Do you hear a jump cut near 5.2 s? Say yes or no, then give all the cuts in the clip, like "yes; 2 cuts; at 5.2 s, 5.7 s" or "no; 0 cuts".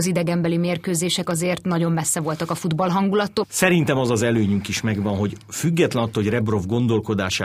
no; 1 cut; at 3.4 s